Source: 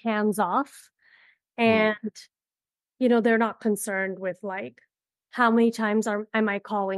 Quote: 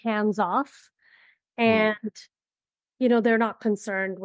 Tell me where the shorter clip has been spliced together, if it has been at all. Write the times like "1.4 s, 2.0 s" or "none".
none